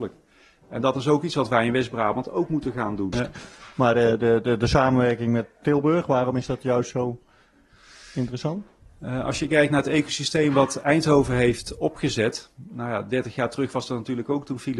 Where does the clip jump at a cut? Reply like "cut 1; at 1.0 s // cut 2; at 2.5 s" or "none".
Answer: cut 1; at 3.1 s